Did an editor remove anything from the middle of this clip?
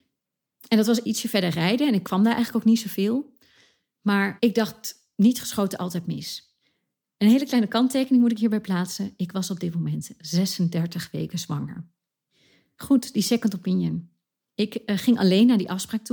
no; 0 cuts

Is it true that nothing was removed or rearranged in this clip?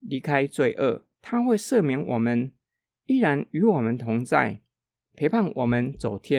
no; 1 cut; at 1.1 s

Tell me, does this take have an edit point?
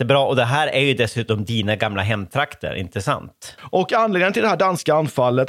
yes; 1 cut; at 3.6 s

